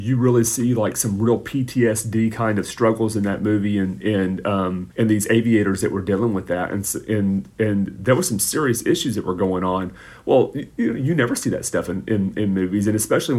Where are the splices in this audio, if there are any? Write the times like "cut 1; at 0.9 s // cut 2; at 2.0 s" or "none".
cut 1; at 4.9 s

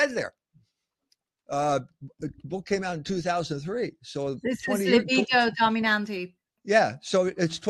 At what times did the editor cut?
cut 1; at 1.4 s

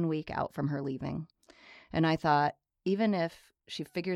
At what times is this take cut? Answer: none

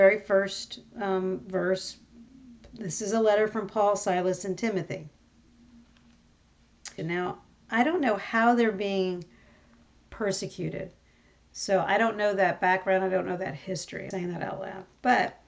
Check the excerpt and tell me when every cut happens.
cut 1; at 7.0 s // cut 2; at 14.1 s

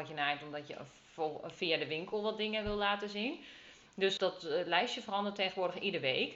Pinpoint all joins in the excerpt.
cut 1; at 4.2 s

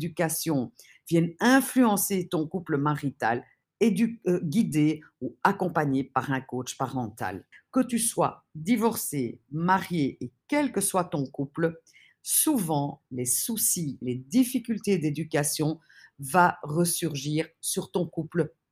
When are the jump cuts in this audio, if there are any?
cut 1; at 3.6 s // cut 2; at 7.5 s // cut 3; at 14.0 s

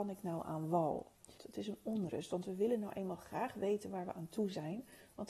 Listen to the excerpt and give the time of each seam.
cut 1; at 1.4 s

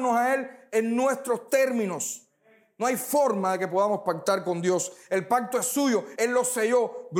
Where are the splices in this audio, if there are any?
cut 1; at 6.2 s

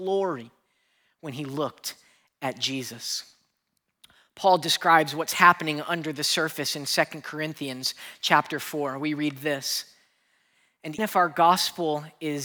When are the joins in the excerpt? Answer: cut 1; at 11.0 s

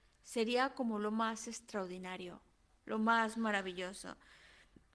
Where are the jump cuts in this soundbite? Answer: none

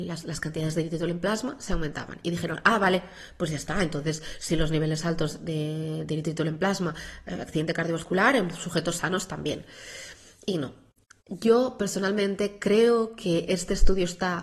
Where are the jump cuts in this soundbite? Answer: none

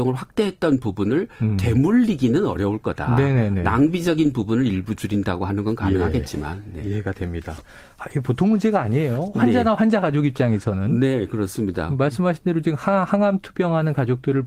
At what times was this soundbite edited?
none

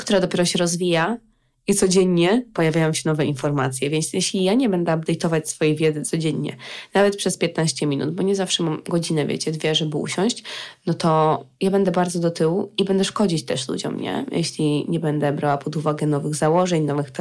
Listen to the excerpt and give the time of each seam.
none

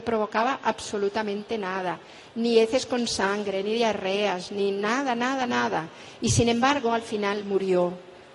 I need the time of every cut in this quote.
none

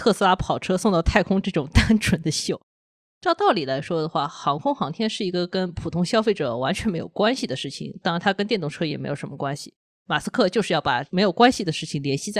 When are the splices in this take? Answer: none

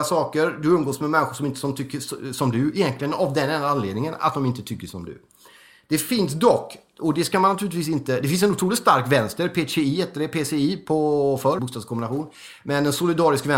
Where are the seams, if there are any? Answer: cut 1; at 11.6 s

